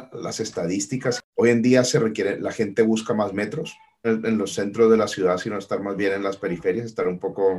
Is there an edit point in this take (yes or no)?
yes